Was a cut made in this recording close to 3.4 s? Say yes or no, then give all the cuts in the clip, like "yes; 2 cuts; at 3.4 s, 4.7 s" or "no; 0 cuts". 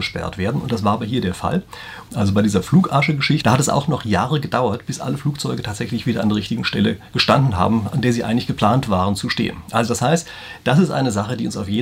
yes; 2 cuts; at 2.1 s, 3.4 s